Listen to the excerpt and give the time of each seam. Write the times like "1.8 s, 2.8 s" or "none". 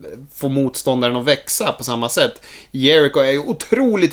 none